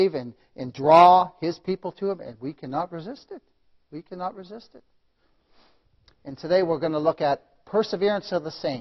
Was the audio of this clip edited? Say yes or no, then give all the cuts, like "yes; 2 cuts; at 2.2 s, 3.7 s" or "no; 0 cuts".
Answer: no; 0 cuts